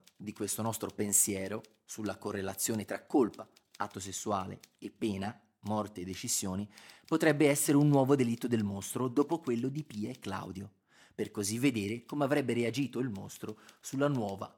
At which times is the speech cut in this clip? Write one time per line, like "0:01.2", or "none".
none